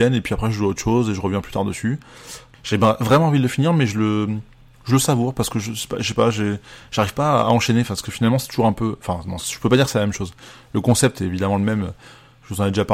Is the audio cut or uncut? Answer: cut